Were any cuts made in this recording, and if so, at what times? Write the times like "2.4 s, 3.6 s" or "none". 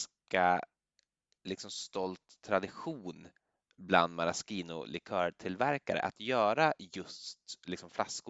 none